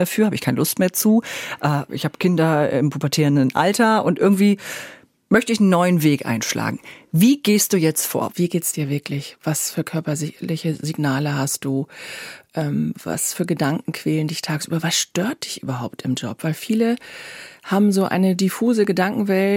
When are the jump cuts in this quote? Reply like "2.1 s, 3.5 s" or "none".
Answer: 1.9 s, 8.3 s